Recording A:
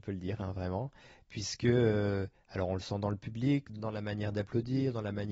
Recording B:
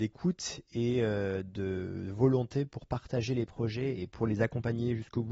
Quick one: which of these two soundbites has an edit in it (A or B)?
A